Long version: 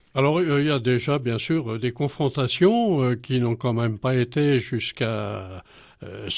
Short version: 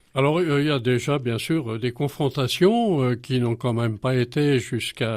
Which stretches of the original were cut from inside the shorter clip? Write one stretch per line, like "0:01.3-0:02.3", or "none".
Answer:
none